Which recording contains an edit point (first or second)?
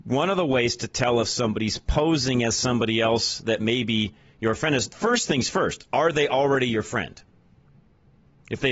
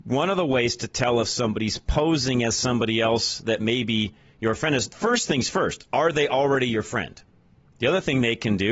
second